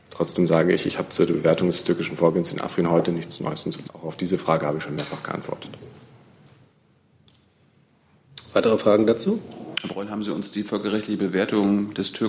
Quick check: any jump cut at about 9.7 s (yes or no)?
yes